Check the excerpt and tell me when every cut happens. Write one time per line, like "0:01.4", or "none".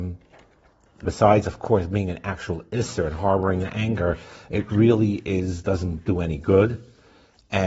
0:01.0

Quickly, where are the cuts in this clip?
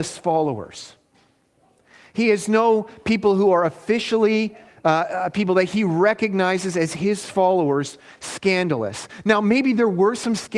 none

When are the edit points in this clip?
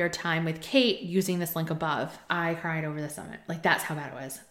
0:02.3

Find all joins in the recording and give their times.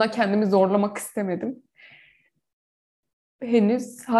none

